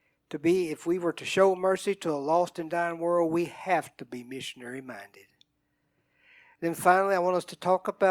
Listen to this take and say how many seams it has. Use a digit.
0